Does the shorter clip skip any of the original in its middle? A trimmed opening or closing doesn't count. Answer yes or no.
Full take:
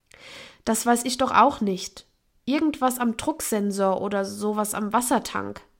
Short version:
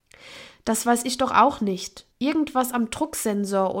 yes